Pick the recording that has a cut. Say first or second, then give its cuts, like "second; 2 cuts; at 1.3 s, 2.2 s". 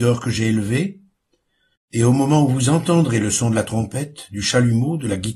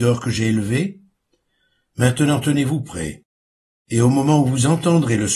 first; 1 cut; at 1.8 s